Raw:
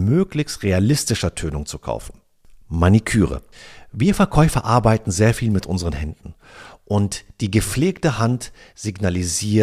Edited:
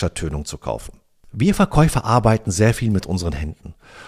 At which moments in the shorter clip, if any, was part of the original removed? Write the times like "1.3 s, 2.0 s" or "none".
1.3 s